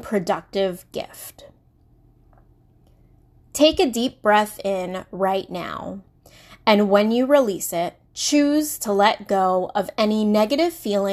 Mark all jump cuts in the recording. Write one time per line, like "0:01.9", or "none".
0:08.0